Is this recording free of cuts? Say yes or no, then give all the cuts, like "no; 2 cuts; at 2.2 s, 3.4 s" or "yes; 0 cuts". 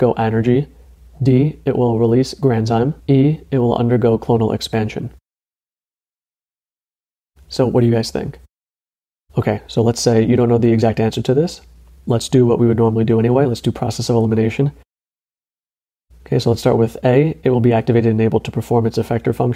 no; 1 cut; at 3.0 s